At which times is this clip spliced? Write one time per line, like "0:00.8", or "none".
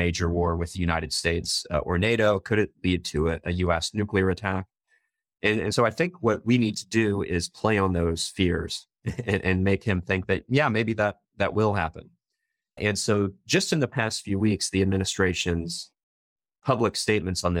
none